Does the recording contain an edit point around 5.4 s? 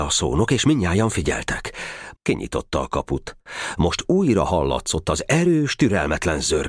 no; 2 cuts; at 2.1 s, 3.8 s

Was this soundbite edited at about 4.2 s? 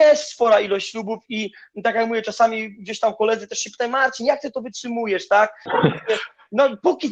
no; 1 cut; at 5.7 s

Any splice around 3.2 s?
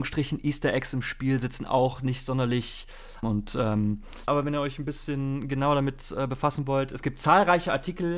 yes; 2 cuts; at 3.2 s, 4.3 s

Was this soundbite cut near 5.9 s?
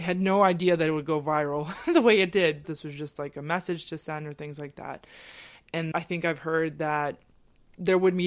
yes; 2 cuts; at 2.6 s, 5.9 s

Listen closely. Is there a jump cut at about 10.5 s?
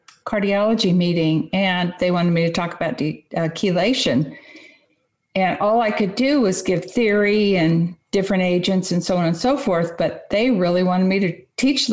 no; 0 cuts

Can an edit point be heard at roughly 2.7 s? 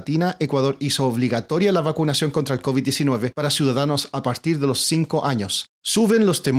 no; 1 cut; at 5.7 s

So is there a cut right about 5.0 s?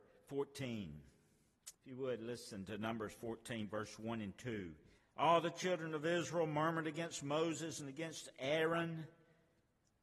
yes; 2 cuts; at 1.7 s, 5.0 s

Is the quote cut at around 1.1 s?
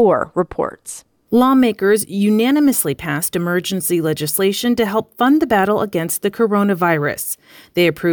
no; 0 cuts

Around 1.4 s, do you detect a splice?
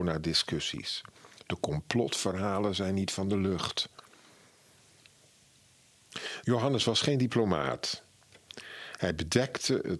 no; 1 cut; at 6.4 s

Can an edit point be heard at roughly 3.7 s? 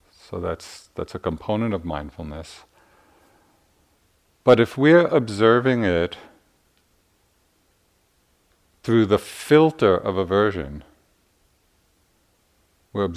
no; 0 cuts

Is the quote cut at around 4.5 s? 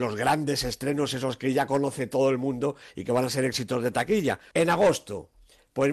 yes; 1 cut; at 4.5 s

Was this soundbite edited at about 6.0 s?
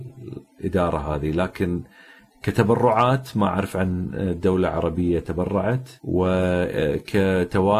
yes; 1 cut; at 6.0 s

